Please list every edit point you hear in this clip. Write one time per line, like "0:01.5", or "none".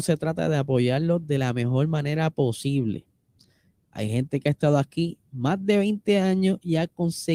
0:03.7